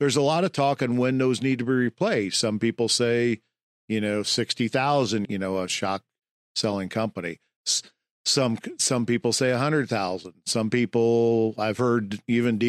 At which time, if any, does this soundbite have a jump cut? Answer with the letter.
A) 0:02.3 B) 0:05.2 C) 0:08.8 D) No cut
B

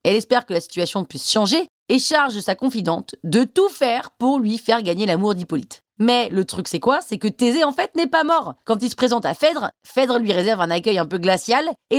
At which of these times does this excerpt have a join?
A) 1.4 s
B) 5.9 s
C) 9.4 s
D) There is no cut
D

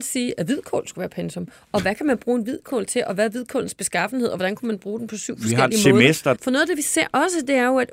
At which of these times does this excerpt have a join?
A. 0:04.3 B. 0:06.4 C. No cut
B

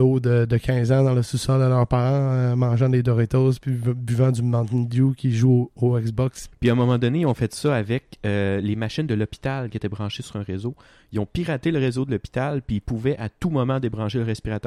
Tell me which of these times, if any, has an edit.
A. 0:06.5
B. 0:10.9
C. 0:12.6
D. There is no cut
A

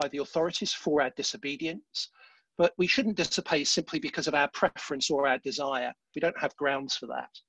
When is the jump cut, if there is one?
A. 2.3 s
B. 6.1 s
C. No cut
B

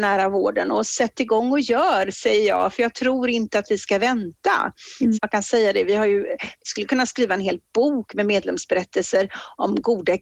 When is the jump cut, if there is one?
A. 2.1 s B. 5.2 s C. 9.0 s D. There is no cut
B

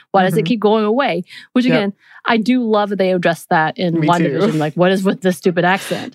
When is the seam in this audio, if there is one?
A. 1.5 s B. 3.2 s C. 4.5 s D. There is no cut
D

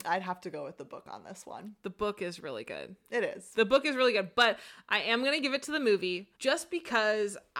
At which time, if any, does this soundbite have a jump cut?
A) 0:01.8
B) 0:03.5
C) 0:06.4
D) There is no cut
C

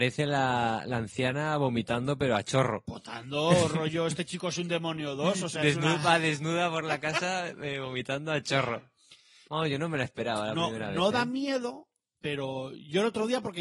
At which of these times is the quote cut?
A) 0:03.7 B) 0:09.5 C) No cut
B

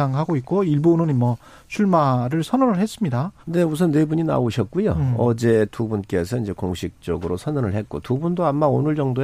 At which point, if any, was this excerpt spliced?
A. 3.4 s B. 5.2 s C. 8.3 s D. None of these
A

